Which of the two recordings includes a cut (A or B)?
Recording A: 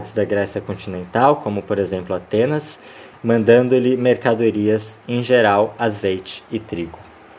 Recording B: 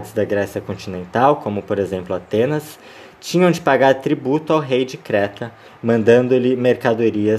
A